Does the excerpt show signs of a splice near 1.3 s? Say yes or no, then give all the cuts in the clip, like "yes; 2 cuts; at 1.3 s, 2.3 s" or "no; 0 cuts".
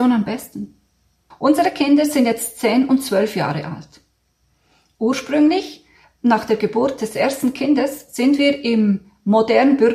yes; 1 cut; at 1.3 s